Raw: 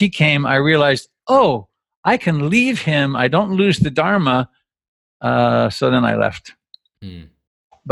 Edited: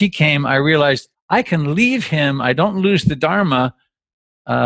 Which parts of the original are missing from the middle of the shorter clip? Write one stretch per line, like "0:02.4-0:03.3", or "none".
0:01.1-0:01.9